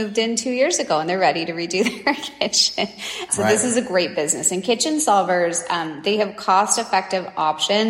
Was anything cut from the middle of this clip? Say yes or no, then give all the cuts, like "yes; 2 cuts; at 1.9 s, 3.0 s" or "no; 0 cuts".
yes; 1 cut; at 3.3 s